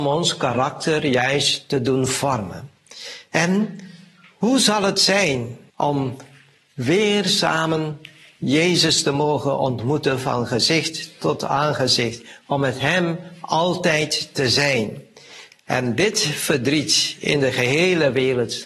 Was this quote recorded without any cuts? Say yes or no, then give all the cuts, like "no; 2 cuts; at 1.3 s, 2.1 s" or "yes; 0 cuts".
no; 2 cuts; at 5.7 s, 15.5 s